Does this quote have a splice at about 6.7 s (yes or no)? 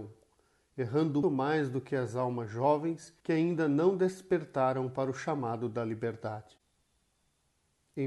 no